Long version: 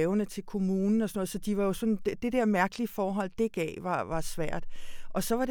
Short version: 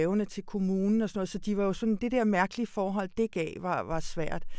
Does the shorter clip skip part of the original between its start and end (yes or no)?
yes